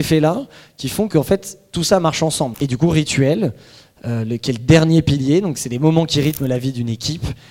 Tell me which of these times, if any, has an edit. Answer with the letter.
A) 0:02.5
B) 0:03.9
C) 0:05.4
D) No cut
A